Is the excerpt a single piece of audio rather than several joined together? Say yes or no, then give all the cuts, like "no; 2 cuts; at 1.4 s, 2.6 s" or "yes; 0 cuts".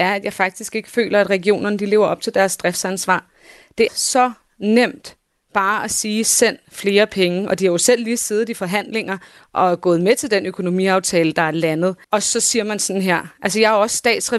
no; 2 cuts; at 3.9 s, 12.0 s